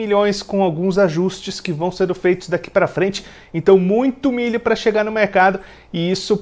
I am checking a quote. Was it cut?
no; 0 cuts

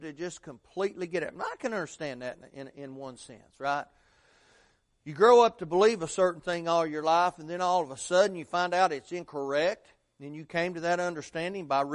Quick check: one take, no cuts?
yes; 0 cuts

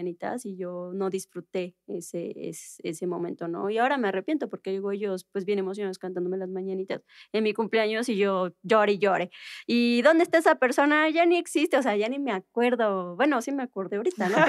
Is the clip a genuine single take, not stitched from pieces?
yes; 0 cuts

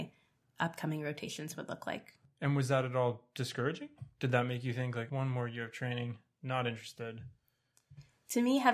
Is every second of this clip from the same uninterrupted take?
no; 1 cut; at 5.1 s

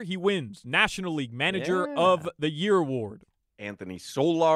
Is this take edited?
yes; 1 cut; at 3.4 s

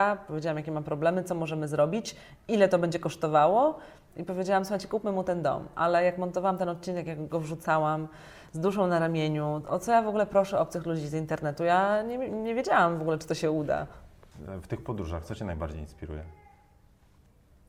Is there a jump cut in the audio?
no; 0 cuts

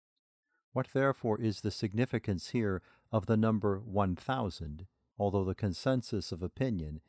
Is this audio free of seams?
no; 1 cut; at 5.1 s

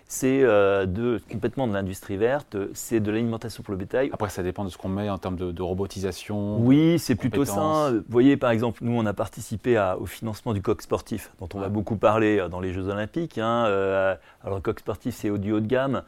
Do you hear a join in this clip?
yes; 1 cut; at 4.1 s

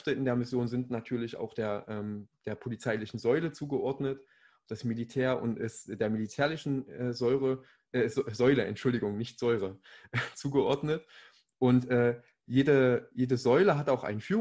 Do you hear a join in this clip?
no; 0 cuts

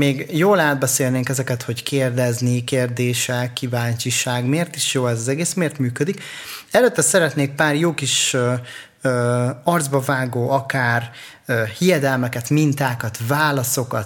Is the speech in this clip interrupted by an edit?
no; 0 cuts

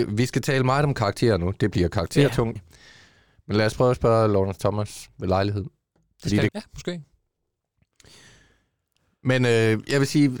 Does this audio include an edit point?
yes; 2 cuts; at 2.6 s, 6.5 s

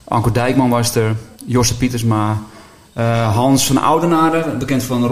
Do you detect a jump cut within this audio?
no; 0 cuts

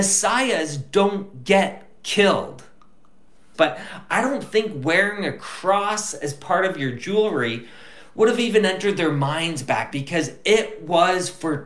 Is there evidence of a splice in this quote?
yes; 2 cuts; at 3.5 s, 9.9 s

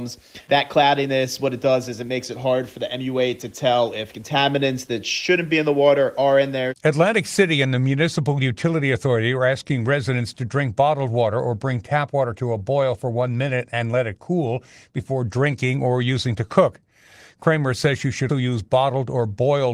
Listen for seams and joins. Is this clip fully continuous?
no; 1 cut; at 18.3 s

